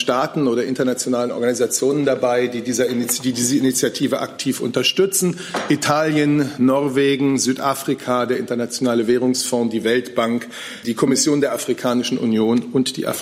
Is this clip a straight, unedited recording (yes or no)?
no